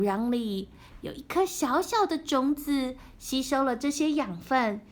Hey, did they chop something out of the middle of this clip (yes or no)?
no